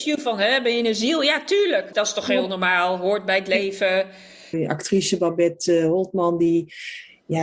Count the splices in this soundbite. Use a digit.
2